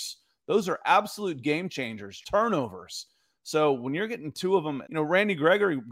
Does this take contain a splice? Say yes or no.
yes